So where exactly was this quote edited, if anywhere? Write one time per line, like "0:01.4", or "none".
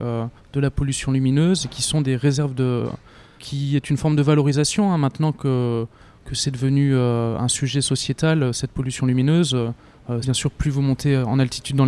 0:03.3
0:10.2